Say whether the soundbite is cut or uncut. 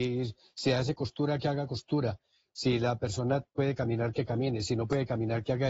uncut